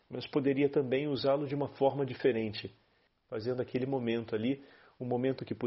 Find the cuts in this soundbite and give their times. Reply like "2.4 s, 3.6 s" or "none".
3.1 s